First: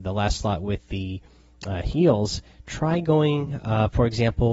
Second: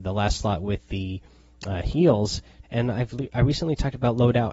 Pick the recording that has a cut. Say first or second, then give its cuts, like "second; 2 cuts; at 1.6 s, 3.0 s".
second; 1 cut; at 2.6 s